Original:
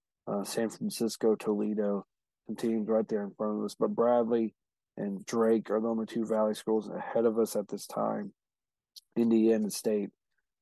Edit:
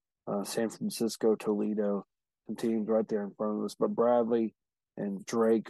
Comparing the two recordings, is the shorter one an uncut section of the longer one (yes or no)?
yes